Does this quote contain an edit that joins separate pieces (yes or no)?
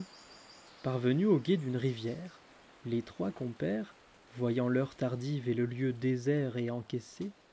no